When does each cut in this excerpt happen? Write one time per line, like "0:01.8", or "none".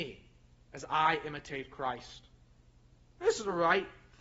none